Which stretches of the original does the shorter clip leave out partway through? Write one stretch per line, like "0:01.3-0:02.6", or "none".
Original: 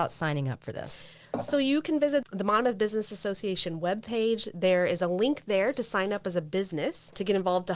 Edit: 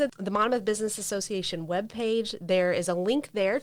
none

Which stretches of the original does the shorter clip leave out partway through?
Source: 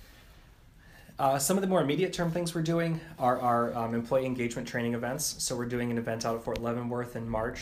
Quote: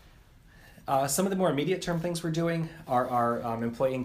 none

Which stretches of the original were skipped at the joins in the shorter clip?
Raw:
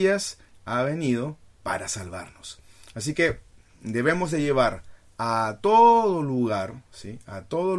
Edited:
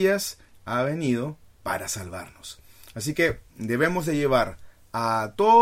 0:03.5-0:03.7

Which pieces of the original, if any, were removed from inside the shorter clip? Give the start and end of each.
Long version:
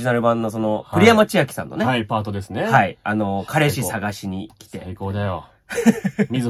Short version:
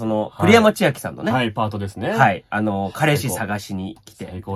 none

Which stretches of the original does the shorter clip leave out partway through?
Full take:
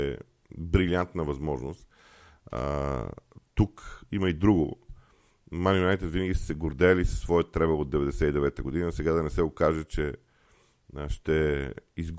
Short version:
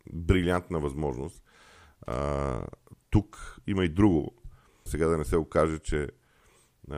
0:05.3-0:08.9

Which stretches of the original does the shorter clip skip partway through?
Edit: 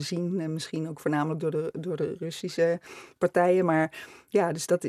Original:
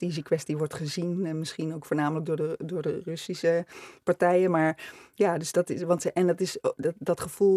none

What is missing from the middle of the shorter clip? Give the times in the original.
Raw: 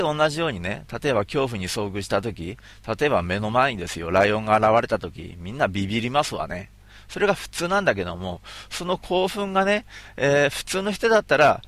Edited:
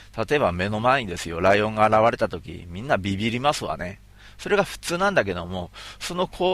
none

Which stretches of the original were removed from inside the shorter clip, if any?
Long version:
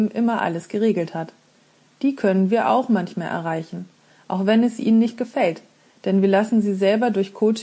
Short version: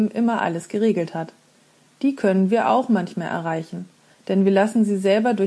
0:04.1-0:05.9

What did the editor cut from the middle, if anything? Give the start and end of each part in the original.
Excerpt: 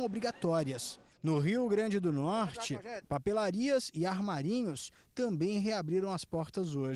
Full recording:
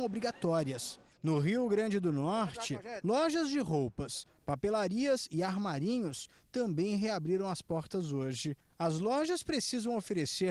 0:03.0-0:04.4

